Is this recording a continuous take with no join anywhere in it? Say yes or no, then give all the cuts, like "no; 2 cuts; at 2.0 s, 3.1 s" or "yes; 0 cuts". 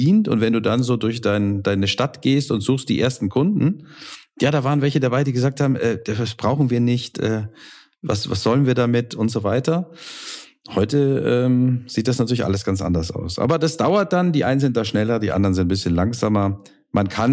yes; 0 cuts